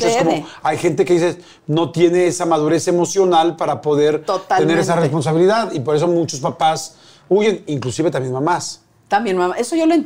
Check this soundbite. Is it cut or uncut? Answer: uncut